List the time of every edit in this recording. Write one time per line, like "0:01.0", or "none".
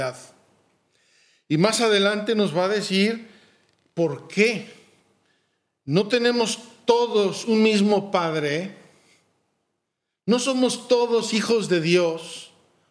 none

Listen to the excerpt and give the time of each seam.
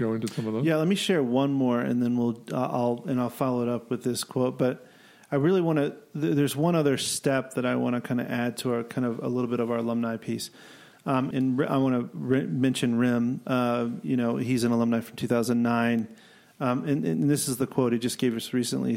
0:11.3

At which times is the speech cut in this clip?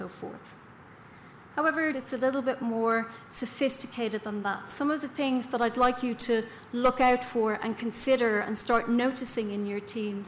0:01.9

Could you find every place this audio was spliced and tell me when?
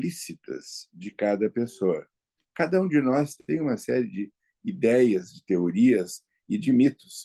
none

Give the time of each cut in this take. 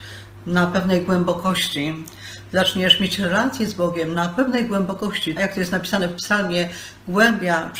0:05.4

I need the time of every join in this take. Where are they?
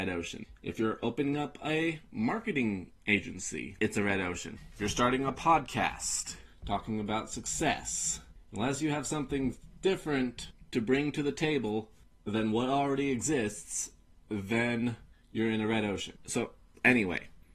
0:03.8
0:16.2

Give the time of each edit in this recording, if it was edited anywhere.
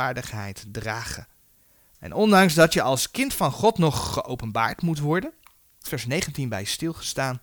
0:05.8

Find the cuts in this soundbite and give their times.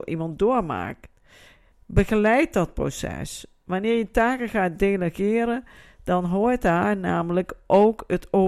0:01.7

